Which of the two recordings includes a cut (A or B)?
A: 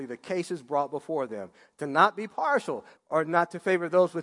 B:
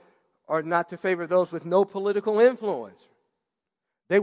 A